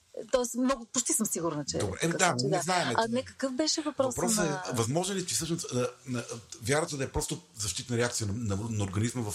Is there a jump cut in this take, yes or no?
no